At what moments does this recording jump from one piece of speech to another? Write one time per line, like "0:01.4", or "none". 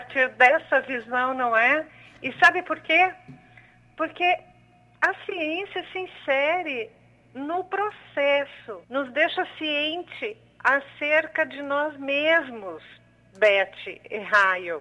0:08.8